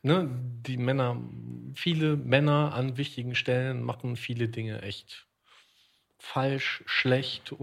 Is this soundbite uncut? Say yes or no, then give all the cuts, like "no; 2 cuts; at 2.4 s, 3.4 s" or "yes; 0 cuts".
yes; 0 cuts